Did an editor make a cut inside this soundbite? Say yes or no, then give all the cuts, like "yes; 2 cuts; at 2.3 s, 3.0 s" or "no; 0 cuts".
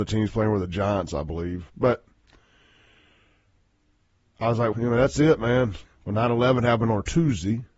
yes; 3 cuts; at 1.7 s, 4.7 s, 5.8 s